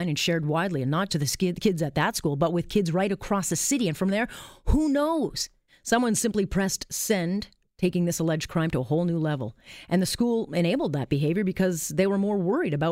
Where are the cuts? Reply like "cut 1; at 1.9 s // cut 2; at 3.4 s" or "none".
cut 1; at 1.1 s // cut 2; at 5.7 s